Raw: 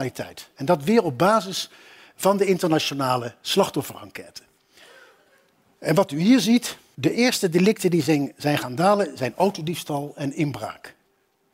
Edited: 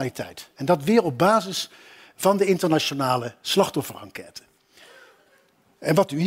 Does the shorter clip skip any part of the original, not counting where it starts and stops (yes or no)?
no